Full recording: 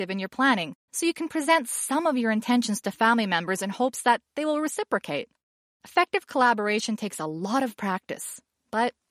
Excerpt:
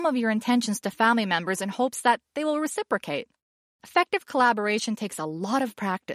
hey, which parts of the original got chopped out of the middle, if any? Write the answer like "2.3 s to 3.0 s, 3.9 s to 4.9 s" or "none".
none